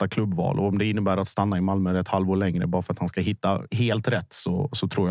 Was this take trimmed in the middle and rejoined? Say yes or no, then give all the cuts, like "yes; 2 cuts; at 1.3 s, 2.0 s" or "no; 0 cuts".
no; 0 cuts